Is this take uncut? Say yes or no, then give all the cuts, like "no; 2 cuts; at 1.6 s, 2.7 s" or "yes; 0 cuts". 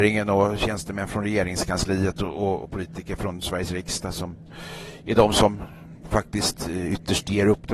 no; 1 cut; at 2.6 s